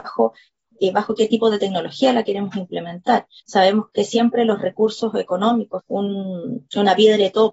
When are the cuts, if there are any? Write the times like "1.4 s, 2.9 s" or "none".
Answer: 3.4 s, 5.8 s